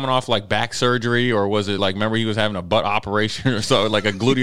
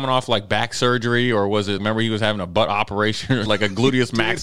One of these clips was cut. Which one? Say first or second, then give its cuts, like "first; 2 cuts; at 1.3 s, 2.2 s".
second; 2 cuts; at 1.8 s, 3.5 s